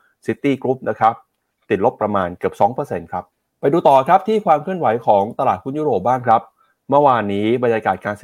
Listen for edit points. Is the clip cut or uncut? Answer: cut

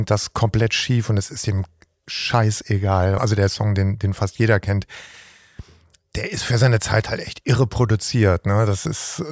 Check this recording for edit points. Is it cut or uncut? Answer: cut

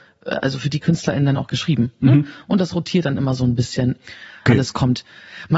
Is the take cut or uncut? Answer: cut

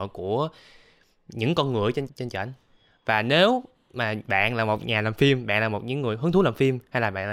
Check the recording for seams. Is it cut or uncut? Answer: cut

